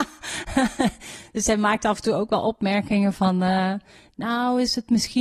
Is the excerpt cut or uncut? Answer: uncut